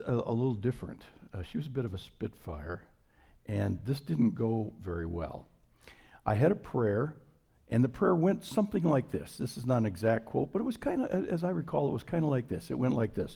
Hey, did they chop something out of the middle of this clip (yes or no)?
no